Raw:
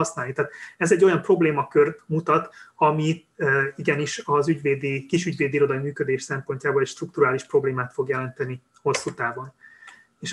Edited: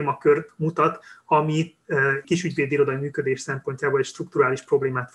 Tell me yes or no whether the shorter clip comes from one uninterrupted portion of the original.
no